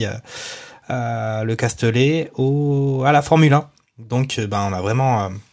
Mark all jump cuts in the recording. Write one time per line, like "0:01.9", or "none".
none